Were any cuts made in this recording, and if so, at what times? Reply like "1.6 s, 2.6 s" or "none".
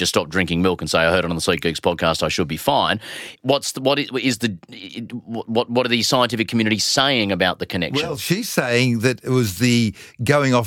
none